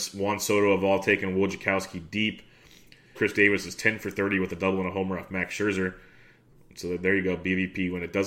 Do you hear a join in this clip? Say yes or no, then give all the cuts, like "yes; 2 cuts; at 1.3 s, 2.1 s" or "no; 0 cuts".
yes; 1 cut; at 3.2 s